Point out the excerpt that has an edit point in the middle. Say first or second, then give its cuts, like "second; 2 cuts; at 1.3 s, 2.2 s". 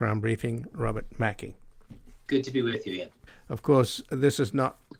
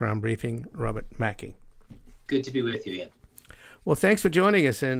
first; 1 cut; at 3.3 s